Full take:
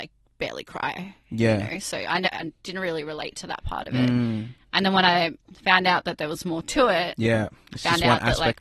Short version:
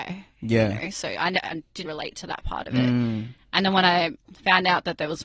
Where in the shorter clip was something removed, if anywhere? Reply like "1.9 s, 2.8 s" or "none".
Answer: 1.8 s